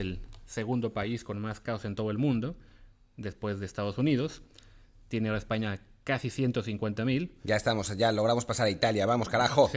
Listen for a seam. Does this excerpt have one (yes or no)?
no